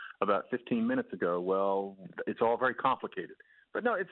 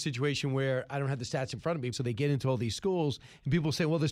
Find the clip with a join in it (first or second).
second